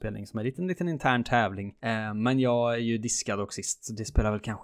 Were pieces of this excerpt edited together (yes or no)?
yes